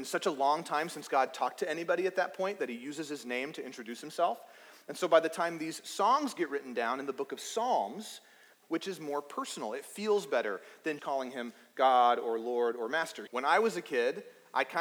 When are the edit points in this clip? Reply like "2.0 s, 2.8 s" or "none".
8.6 s, 11.0 s, 13.3 s